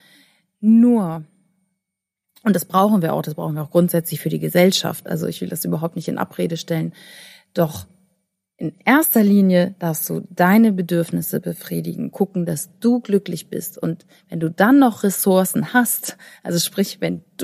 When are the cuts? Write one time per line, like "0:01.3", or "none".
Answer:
none